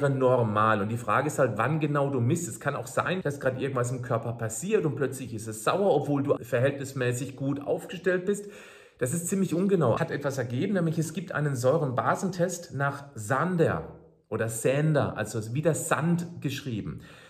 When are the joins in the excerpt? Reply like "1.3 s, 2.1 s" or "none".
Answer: 3.2 s, 6.4 s, 10.0 s